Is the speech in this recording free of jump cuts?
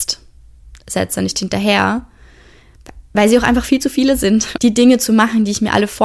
no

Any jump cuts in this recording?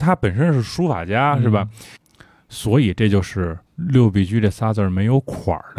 yes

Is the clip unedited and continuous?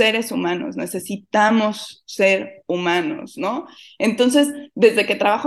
yes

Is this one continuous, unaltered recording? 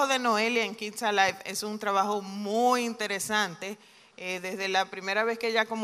yes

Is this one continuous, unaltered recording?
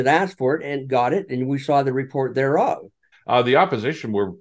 no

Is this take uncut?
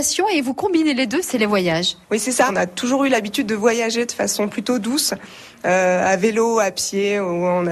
no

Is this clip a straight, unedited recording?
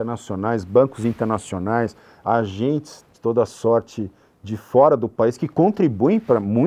no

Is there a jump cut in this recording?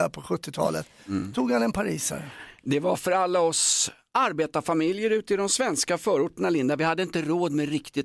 no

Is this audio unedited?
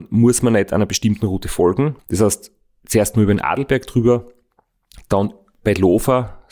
no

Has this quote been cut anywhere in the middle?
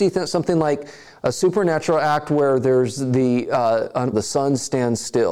yes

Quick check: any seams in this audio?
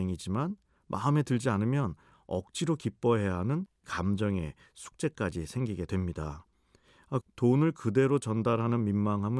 yes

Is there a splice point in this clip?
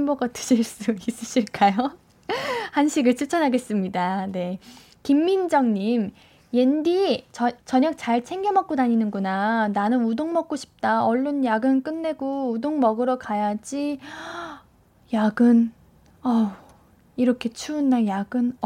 yes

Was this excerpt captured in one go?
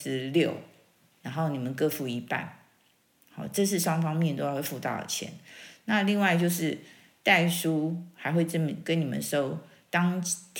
yes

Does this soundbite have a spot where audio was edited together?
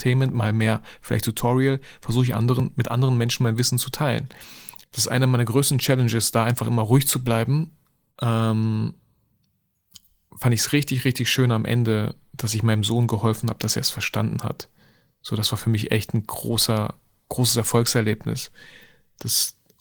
yes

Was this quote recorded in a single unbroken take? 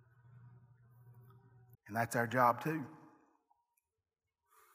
no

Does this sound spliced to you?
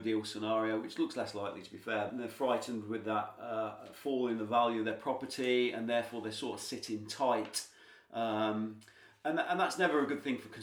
yes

